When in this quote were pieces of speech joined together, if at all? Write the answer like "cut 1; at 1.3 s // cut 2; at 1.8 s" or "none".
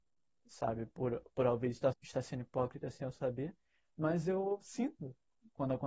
cut 1; at 1.9 s